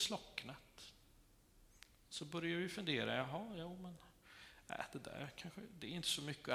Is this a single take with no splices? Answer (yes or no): yes